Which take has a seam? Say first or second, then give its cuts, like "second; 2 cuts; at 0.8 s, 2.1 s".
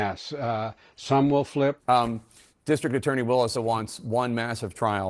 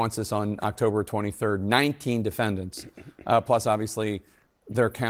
first; 2 cuts; at 1.8 s, 3.5 s